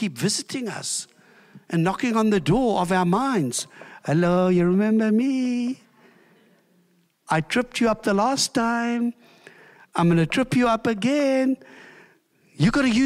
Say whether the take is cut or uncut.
uncut